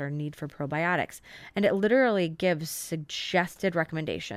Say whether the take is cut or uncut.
uncut